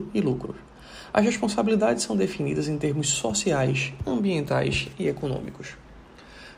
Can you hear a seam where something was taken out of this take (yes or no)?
no